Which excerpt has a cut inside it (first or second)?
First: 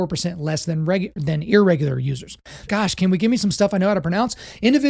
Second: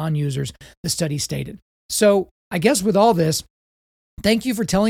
first